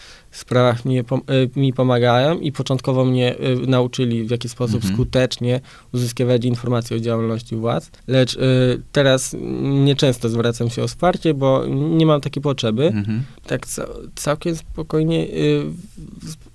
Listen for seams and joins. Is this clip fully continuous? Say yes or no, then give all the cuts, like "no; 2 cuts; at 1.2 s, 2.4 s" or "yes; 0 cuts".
no; 2 cuts; at 8.0 s, 13.4 s